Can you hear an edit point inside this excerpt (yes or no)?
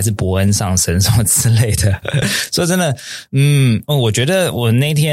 no